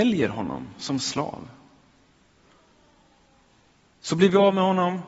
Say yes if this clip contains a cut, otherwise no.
no